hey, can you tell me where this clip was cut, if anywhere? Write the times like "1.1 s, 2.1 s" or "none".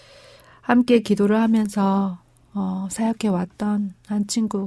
none